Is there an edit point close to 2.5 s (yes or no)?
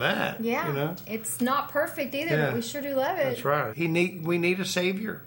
no